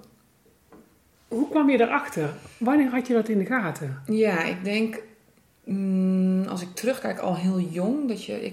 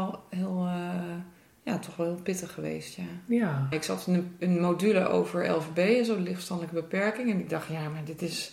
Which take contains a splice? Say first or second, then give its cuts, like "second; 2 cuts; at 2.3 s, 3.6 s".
second; 1 cut; at 3.7 s